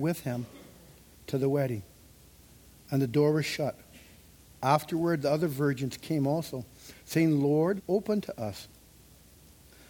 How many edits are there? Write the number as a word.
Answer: one